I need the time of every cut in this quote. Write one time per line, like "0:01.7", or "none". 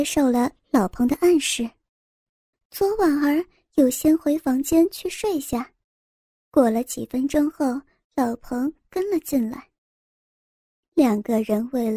0:02.5